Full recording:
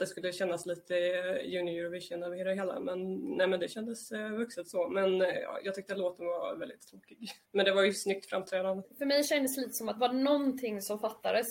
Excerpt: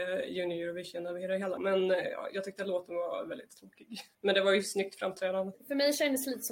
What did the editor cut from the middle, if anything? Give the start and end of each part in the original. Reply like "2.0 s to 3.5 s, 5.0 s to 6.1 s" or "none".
2.7 s to 4.9 s

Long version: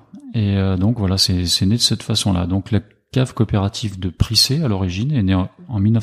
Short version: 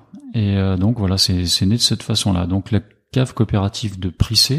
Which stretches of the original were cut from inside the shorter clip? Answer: none

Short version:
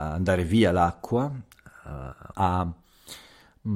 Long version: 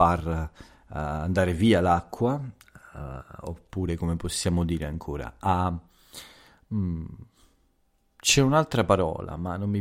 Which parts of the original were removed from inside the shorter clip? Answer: 3.4 s to 5.4 s

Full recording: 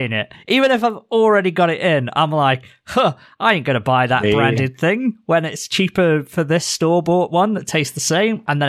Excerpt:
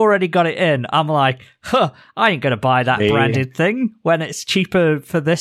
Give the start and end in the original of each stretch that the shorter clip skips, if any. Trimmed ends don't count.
none

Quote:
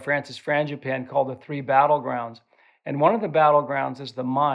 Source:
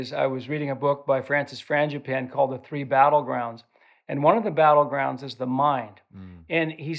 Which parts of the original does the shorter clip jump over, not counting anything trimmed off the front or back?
none

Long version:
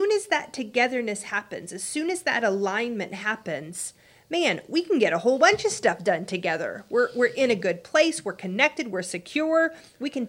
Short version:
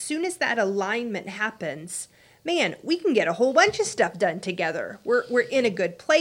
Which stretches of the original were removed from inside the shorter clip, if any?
none

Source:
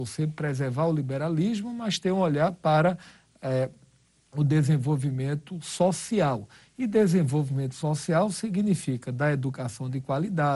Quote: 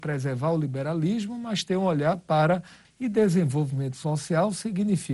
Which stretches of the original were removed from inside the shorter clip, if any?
3.2 s to 6.6 s

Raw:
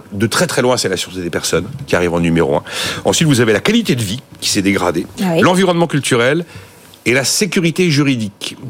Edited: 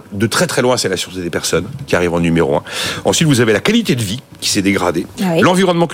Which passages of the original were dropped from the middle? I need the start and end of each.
none

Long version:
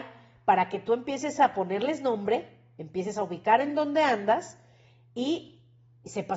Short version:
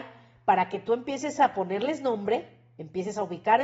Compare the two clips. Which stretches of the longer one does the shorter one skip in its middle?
none

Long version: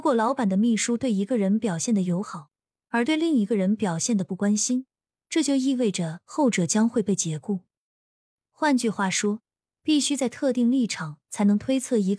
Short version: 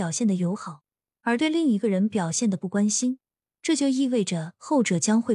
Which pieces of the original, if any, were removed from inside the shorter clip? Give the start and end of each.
none

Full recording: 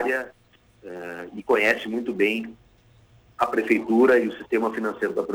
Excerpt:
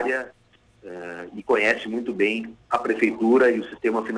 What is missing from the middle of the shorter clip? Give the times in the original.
2.6 s to 3.3 s

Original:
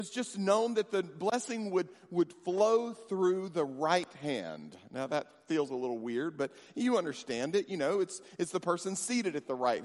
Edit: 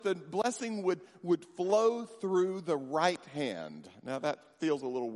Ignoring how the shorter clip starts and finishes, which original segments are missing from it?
none

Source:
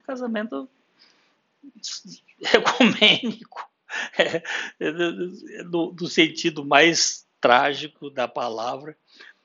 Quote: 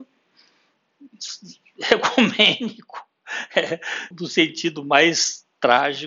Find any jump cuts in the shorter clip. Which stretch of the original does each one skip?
4.7 s to 5.9 s

